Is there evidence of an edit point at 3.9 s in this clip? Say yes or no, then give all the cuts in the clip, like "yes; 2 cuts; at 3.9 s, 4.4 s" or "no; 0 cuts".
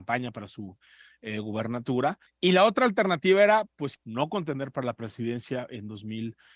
yes; 2 cuts; at 2.3 s, 3.9 s